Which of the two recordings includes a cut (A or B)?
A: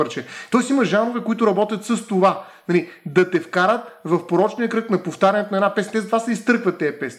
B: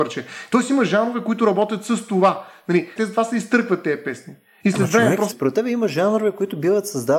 B